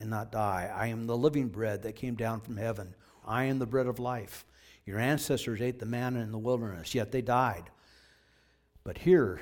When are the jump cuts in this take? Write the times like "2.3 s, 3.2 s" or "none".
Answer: 3.2 s